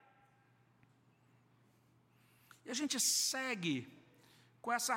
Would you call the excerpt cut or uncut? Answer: uncut